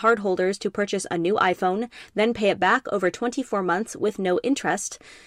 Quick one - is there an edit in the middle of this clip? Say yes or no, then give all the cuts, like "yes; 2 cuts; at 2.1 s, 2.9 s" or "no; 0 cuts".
no; 0 cuts